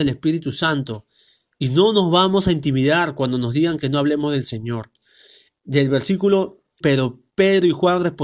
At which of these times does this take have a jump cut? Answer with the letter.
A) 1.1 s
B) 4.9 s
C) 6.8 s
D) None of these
C